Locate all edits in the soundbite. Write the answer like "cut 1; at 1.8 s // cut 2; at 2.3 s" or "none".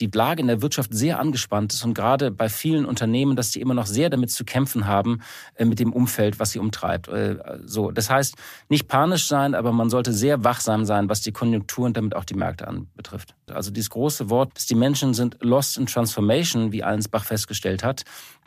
cut 1; at 13.5 s // cut 2; at 14.5 s